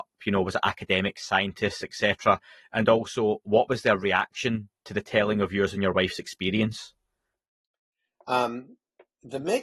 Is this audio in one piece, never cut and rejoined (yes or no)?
yes